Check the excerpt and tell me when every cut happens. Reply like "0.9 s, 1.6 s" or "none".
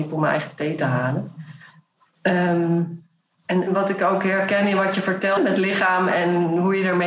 3.7 s, 5.4 s